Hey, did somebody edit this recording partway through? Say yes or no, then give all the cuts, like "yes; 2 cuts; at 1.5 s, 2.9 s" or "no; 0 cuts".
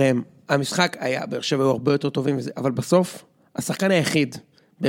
no; 0 cuts